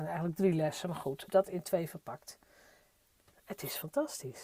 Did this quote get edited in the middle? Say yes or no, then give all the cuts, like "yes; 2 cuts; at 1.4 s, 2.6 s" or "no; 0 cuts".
yes; 2 cuts; at 1.3 s, 3.3 s